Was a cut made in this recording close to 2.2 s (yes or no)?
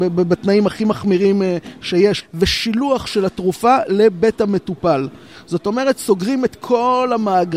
yes